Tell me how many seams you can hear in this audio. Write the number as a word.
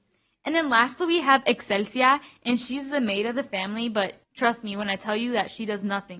one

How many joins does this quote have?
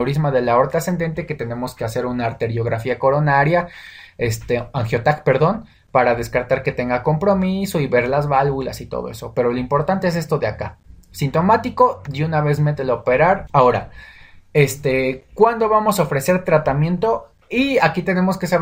two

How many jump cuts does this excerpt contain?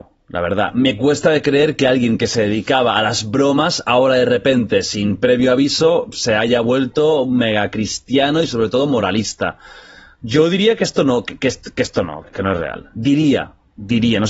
one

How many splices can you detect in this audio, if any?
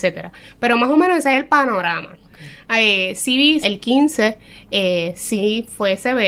two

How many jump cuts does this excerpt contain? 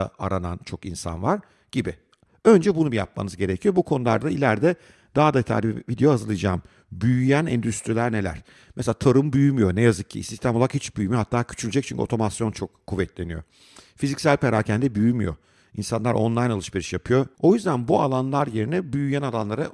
one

